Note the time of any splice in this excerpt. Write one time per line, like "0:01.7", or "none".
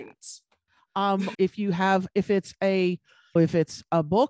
0:01.3
0:03.4